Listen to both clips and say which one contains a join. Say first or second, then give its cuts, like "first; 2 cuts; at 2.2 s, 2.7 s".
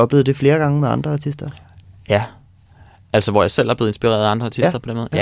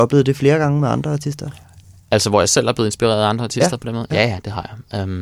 second; 1 cut; at 2.0 s